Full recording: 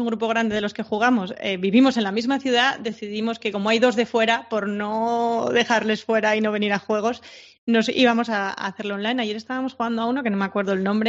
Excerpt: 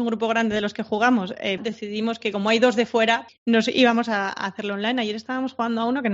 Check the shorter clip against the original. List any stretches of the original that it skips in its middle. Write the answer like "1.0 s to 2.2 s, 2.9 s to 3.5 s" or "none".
1.6 s to 2.8 s, 4.5 s to 7.5 s